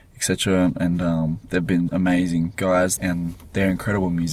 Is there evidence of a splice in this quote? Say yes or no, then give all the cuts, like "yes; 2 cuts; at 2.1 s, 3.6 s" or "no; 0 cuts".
yes; 2 cuts; at 1.9 s, 3.0 s